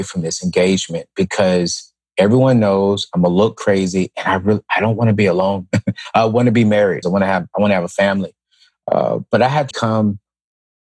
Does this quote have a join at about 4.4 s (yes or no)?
no